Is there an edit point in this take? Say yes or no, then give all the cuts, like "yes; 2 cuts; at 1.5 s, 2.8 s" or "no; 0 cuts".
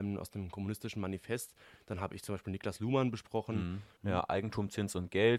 yes; 1 cut; at 4.0 s